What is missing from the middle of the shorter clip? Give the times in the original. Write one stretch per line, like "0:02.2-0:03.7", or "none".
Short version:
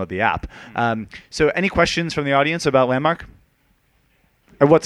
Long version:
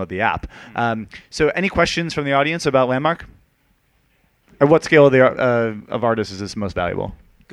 none